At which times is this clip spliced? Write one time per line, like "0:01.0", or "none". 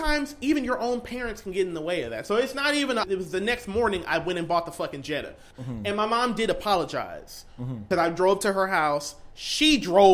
0:03.0
0:05.5
0:07.9